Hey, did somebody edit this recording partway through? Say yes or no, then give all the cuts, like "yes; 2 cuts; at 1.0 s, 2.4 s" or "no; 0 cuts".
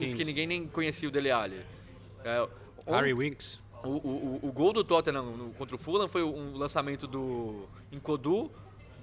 no; 0 cuts